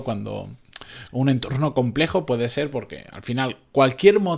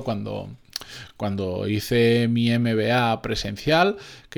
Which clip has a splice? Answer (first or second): first